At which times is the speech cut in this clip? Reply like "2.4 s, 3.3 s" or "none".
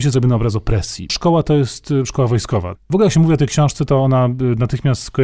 1.1 s, 2.8 s